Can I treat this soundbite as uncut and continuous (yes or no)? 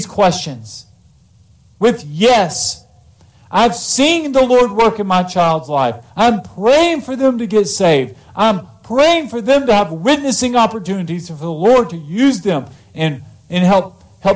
yes